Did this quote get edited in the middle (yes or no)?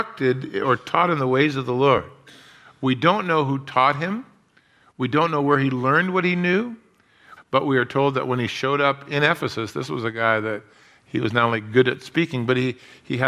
yes